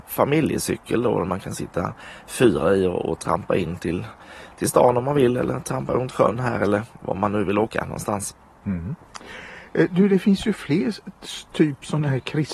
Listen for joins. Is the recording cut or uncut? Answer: uncut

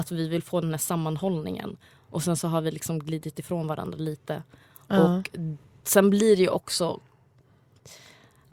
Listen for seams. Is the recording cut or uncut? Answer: uncut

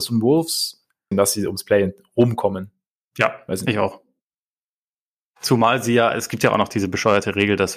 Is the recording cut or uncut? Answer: cut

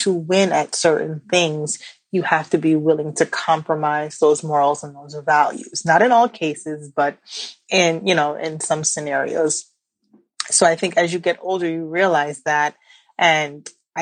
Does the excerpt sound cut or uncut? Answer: uncut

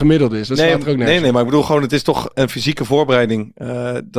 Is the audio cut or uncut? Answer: cut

